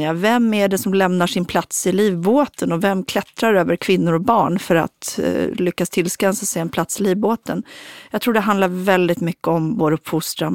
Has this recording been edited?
no; 0 cuts

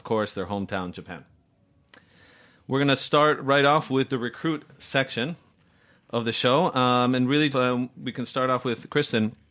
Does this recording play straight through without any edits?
no; 1 cut; at 7.5 s

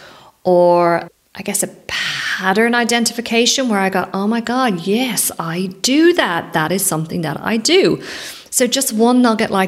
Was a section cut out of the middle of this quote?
no; 0 cuts

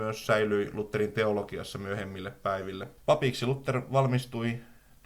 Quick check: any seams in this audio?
yes; 1 cut; at 3.0 s

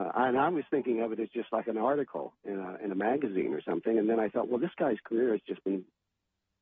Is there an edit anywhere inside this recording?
no; 0 cuts

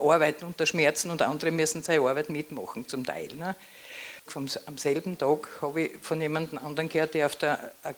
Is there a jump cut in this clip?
yes; 1 cut; at 4.3 s

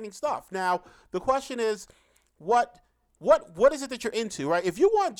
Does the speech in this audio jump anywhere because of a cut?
no; 0 cuts

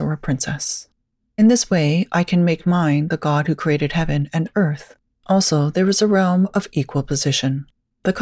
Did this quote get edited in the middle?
yes; 2 cuts; at 1.2 s, 5.1 s

